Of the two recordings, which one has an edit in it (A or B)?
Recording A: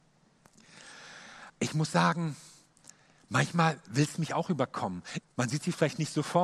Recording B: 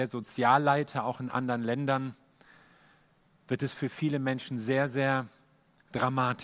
A